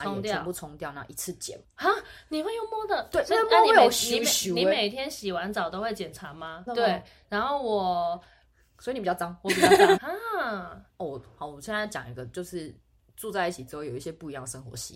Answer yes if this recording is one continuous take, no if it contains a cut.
no